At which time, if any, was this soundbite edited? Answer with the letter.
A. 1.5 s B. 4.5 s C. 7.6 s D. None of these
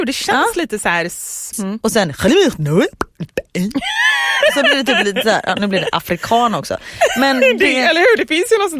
A